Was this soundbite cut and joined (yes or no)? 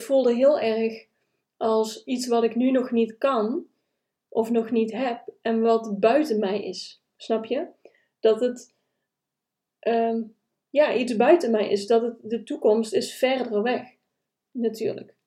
no